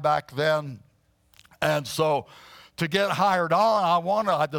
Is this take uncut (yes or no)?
yes